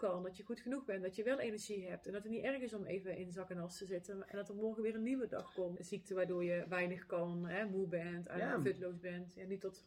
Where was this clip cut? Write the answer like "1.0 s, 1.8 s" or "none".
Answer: 5.8 s